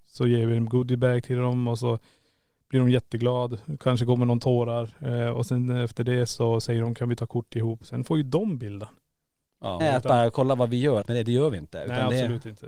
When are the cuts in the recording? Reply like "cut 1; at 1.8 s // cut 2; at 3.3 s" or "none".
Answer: cut 1; at 9.8 s // cut 2; at 11.0 s